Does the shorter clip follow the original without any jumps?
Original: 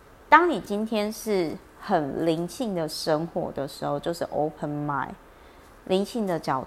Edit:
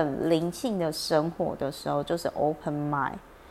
yes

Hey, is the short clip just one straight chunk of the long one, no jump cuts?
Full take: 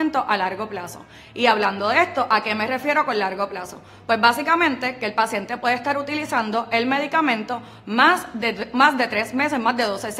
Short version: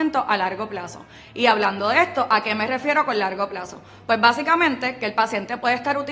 yes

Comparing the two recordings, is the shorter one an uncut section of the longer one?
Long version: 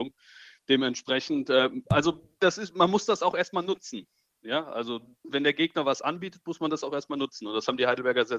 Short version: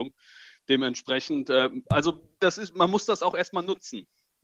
yes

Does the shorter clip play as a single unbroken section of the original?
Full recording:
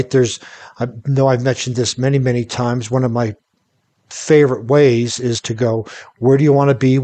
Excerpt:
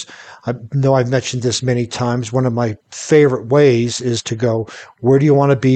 no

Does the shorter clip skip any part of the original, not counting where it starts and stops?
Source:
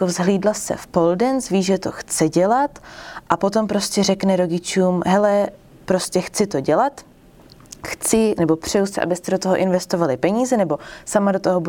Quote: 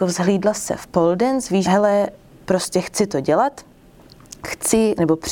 yes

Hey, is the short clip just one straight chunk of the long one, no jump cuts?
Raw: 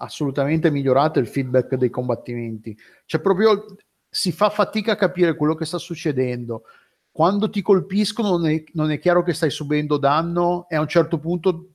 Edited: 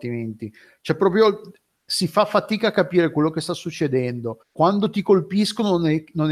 no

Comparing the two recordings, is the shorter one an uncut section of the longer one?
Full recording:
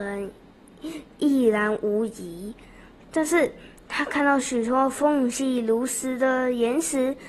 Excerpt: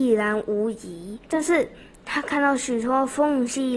no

